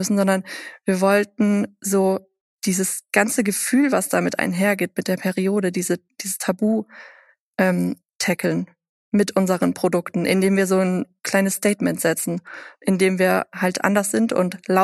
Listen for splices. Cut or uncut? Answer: uncut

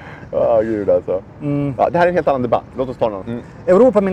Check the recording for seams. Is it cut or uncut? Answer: cut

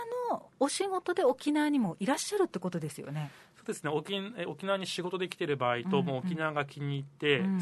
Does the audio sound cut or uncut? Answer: uncut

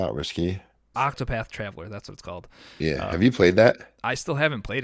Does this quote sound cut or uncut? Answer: cut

